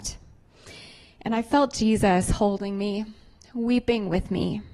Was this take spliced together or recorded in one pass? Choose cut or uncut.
uncut